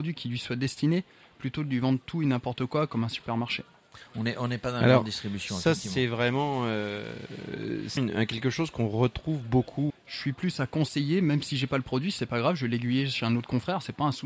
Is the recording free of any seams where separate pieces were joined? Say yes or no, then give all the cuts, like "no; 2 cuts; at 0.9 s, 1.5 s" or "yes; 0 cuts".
no; 2 cuts; at 8.0 s, 9.9 s